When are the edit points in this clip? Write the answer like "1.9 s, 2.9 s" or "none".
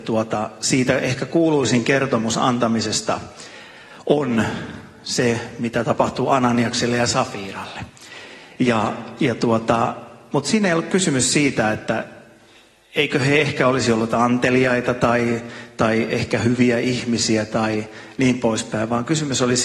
8.6 s